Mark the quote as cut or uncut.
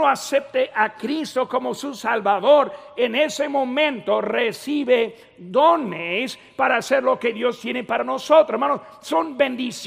uncut